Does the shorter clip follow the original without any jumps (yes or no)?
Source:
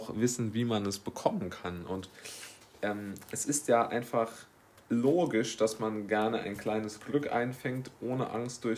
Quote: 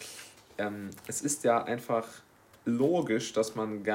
yes